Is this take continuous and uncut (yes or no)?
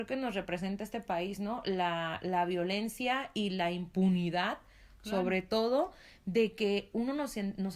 yes